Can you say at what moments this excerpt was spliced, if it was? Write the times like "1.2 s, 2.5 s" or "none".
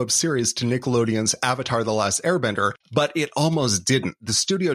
2.8 s